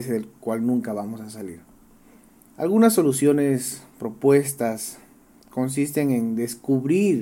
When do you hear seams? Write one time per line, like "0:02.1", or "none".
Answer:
0:02.5